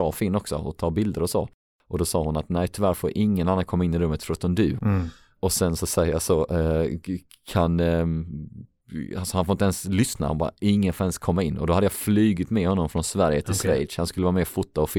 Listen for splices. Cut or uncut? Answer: cut